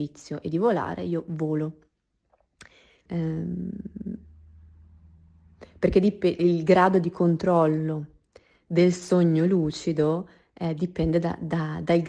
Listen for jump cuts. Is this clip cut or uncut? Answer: cut